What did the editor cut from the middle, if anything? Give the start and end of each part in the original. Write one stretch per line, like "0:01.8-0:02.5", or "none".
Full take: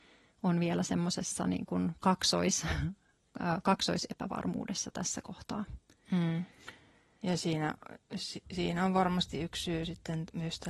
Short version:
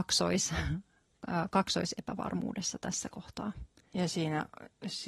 0:05.9-0:07.1